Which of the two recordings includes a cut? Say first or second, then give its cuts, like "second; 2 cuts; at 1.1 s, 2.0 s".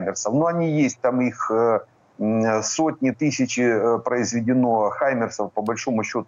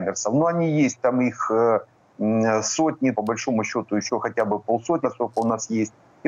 second; 2 cuts; at 3.1 s, 5.0 s